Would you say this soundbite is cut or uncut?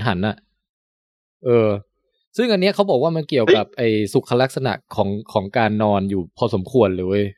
uncut